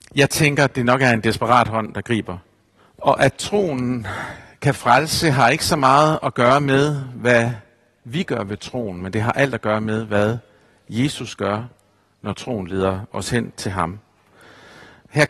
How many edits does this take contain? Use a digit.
1